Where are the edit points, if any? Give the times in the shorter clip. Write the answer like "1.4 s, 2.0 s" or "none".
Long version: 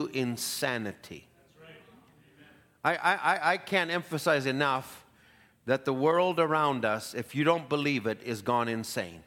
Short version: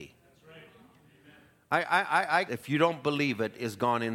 2.5 s